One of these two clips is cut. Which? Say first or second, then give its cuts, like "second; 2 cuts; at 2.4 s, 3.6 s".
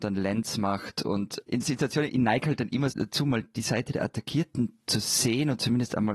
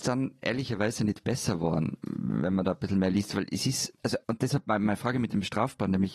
first; 2 cuts; at 1.6 s, 2.9 s